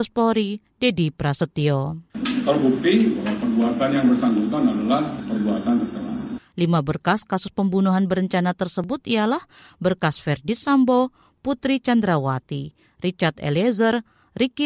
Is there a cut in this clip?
yes; 1 cut; at 6.4 s

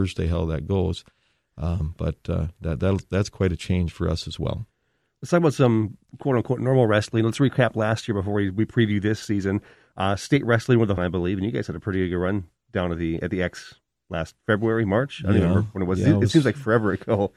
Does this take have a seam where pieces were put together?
yes; 1 cut; at 11.0 s

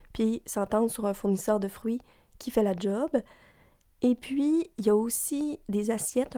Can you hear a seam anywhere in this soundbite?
no; 0 cuts

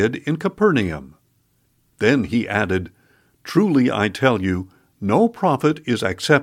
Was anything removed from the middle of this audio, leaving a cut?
no; 0 cuts

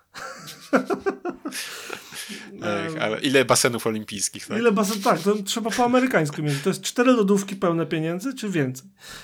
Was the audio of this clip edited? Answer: yes; 1 cut; at 3.2 s

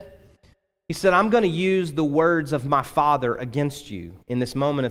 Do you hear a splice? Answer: no; 0 cuts

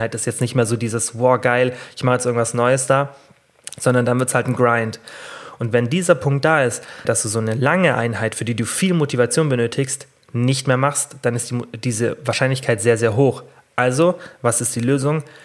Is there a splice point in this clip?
yes; 1 cut; at 7.0 s

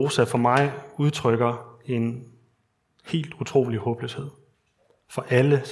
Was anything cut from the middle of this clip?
no; 0 cuts

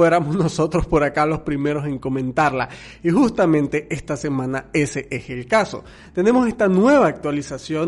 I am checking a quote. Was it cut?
no; 0 cuts

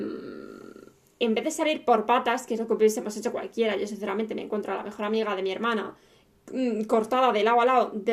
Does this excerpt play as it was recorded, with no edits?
yes; 0 cuts

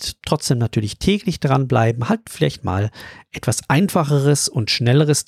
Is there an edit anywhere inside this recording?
no; 0 cuts

